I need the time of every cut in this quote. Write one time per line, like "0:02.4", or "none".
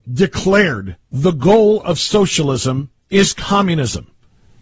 0:01.0
0:03.0